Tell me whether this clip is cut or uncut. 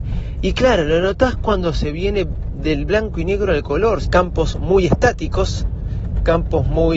cut